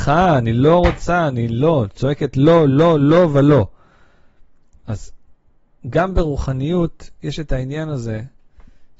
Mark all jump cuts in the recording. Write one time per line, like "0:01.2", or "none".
none